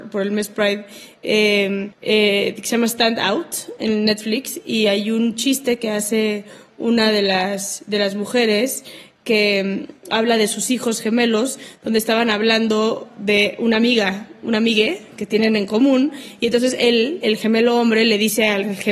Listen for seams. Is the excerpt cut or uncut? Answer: cut